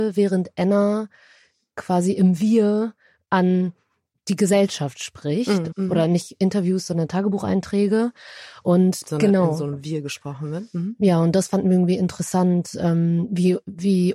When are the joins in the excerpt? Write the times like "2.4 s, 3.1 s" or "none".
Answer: 5.7 s, 9.0 s